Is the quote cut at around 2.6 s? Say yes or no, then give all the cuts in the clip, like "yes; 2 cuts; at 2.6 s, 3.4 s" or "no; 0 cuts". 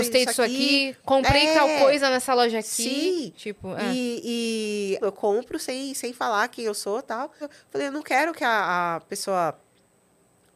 no; 2 cuts; at 5.0 s, 7.4 s